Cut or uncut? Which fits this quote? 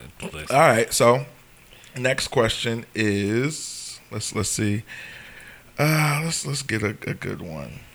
uncut